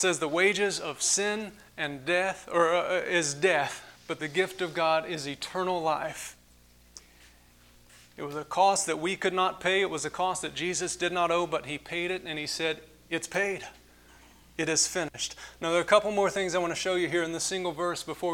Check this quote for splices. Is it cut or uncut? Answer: cut